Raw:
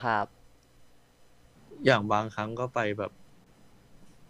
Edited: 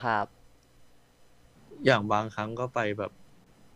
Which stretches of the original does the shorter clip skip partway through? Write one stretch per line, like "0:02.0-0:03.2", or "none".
none